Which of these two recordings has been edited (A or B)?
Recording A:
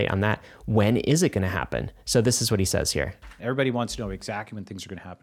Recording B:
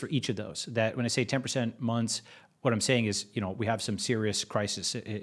A